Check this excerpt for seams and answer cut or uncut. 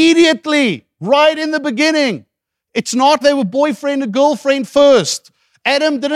cut